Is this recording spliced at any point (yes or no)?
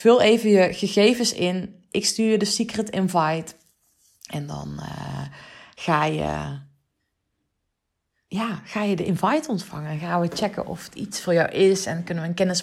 no